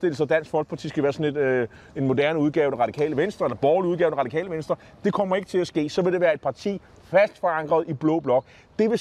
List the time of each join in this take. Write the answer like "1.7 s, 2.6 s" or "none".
none